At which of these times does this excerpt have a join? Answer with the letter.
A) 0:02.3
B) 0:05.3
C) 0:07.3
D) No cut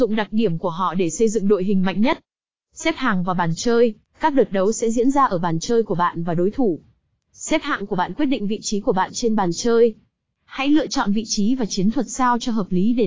D